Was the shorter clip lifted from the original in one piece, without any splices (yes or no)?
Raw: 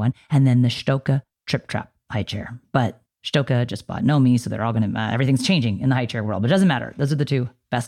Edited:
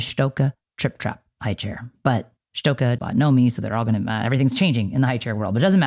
no